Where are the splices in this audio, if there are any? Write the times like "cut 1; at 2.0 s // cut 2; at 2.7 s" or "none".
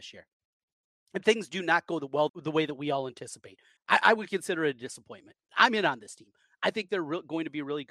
cut 1; at 2.3 s // cut 2; at 3.8 s // cut 3; at 5.5 s

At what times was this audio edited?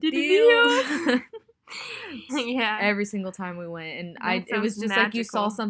cut 1; at 2.3 s

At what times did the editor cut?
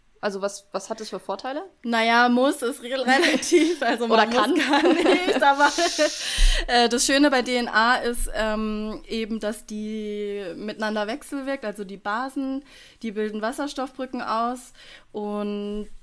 none

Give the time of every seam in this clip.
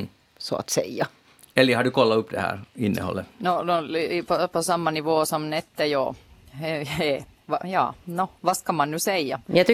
none

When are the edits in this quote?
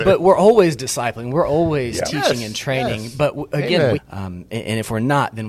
cut 1; at 3.9 s

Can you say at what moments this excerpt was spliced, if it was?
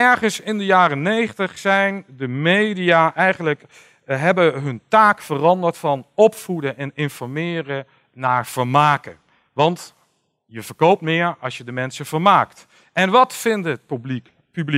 none

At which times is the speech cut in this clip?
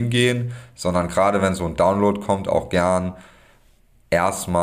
none

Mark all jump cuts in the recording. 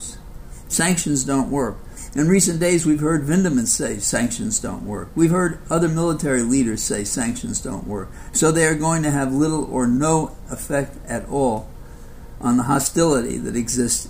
cut 1; at 8.3 s

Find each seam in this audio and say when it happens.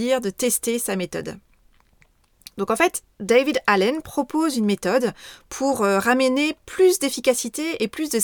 none

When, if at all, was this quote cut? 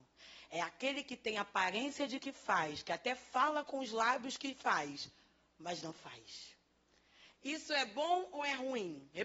cut 1; at 7.3 s

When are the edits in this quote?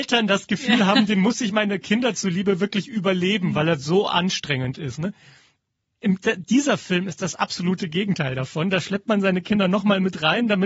none

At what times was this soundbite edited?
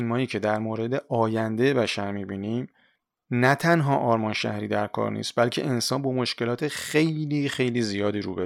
none

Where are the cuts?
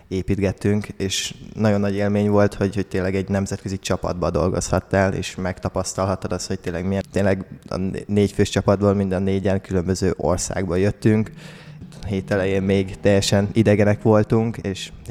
cut 1; at 7.0 s // cut 2; at 11.8 s

